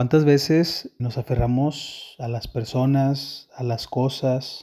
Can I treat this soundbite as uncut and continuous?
no; 1 cut; at 1.0 s

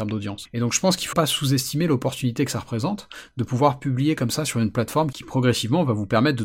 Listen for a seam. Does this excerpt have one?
yes; 1 cut; at 1.1 s

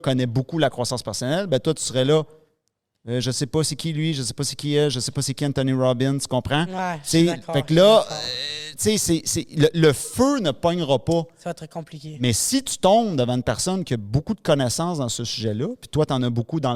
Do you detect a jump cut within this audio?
no; 0 cuts

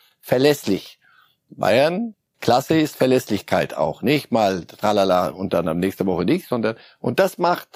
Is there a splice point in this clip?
no; 0 cuts

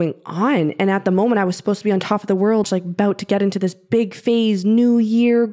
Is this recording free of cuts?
no; 1 cut; at 2.6 s

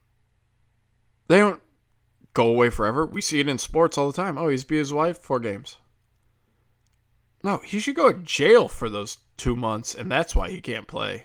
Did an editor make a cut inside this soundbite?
no; 0 cuts

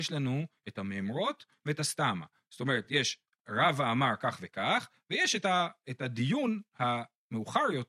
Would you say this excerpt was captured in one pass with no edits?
yes; 0 cuts

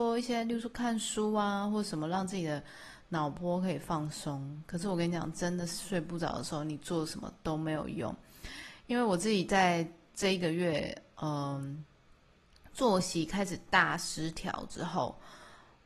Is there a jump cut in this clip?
no; 0 cuts

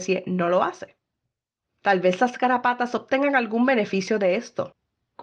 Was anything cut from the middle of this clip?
yes; 1 cut; at 1.7 s

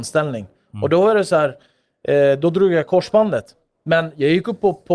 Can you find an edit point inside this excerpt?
no; 0 cuts

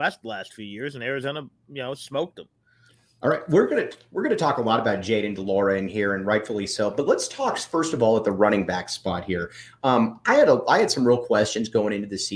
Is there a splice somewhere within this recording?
no; 0 cuts

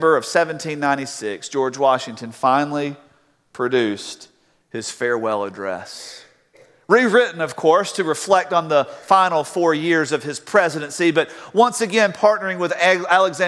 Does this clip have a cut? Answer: no; 0 cuts

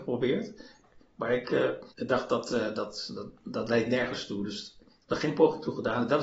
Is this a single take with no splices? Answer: no; 1 cut; at 1.9 s

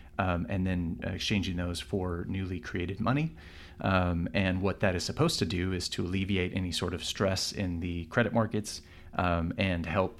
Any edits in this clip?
no; 0 cuts

